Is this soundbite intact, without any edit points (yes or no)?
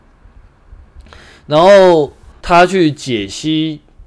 no